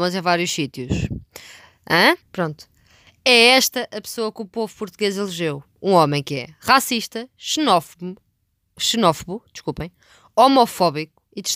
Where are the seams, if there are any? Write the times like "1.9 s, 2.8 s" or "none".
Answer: 2.2 s